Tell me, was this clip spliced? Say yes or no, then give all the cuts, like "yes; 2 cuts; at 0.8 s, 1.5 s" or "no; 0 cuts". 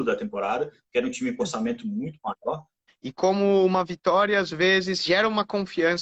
yes; 1 cut; at 2.9 s